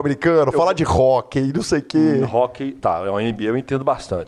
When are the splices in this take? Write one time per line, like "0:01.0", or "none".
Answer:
0:02.8